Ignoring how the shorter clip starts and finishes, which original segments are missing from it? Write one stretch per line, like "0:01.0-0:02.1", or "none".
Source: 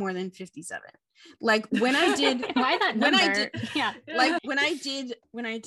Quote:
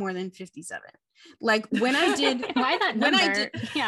none